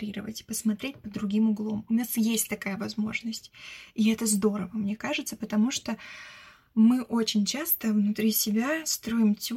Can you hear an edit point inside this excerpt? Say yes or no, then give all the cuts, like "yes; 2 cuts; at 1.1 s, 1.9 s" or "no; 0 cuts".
no; 0 cuts